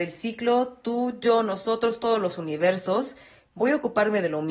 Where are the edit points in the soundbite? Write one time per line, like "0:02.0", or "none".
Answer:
none